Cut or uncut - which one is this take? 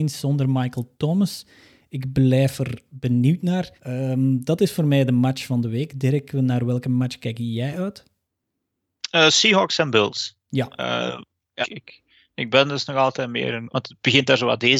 cut